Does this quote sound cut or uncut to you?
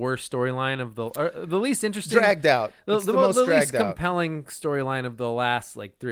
uncut